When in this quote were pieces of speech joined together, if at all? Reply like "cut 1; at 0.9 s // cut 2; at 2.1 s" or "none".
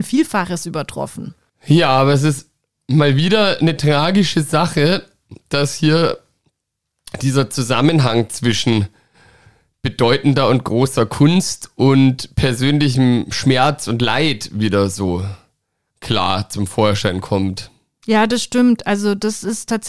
none